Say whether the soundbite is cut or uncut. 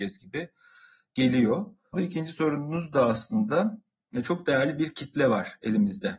cut